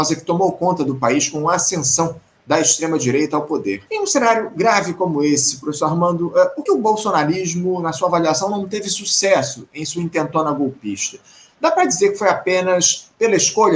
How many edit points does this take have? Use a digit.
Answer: 2